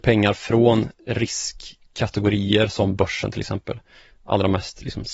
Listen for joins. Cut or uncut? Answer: uncut